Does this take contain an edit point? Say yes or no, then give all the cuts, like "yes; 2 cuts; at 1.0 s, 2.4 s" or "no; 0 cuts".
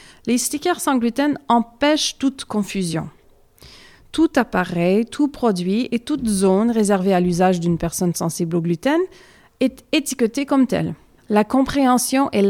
yes; 1 cut; at 11.2 s